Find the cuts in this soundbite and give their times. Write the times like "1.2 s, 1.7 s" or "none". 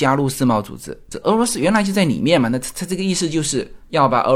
1.2 s